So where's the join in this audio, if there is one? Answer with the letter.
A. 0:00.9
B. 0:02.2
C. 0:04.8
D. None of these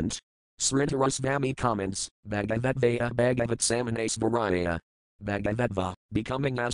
D